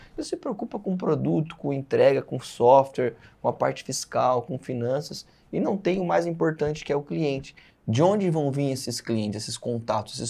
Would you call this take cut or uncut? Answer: cut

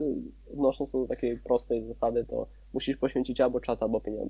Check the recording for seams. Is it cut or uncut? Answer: uncut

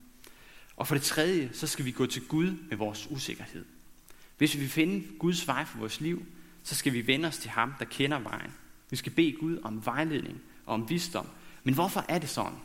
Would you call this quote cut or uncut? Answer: cut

